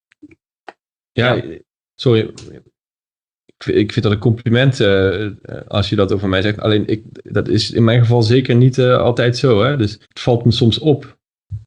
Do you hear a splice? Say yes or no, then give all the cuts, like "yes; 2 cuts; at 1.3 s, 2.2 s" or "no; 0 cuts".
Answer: yes; 1 cut; at 10.0 s